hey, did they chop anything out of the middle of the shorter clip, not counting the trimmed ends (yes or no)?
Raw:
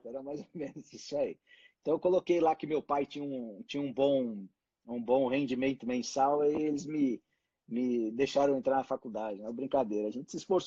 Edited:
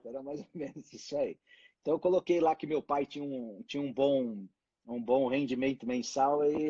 no